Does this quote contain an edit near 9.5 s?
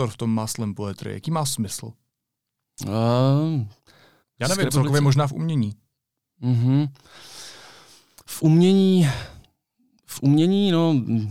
no; 1 cut; at 4.2 s

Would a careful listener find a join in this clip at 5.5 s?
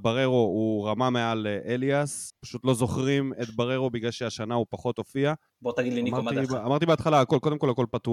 yes; 1 cut; at 5.5 s

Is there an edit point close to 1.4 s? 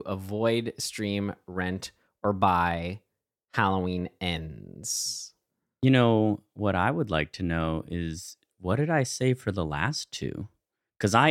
no; 0 cuts

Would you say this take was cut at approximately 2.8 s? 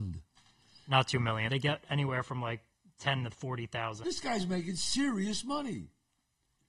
no; 2 cuts; at 1.5 s, 4.0 s

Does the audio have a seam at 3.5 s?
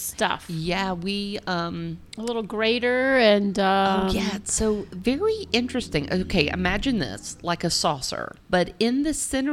no; 1 cut; at 8.4 s

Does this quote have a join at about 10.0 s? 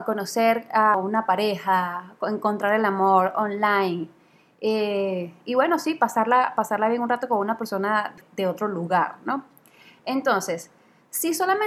no; 0 cuts

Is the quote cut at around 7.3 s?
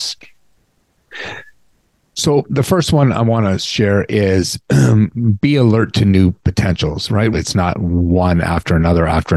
yes; 1 cut; at 7.3 s

